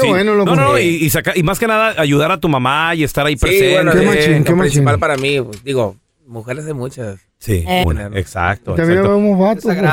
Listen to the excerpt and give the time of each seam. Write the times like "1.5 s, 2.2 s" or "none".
7.8 s